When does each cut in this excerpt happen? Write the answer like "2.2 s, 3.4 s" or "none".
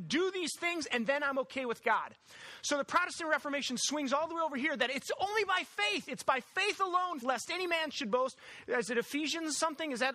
7.2 s